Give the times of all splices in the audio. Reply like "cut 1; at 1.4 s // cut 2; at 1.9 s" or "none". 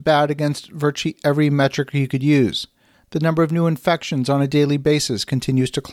cut 1; at 2.9 s